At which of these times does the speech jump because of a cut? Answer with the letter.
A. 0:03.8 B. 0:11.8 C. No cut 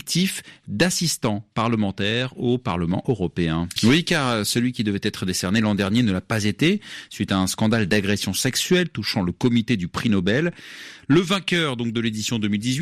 A